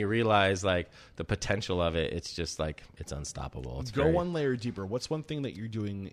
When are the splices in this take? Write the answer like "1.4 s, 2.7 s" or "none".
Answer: none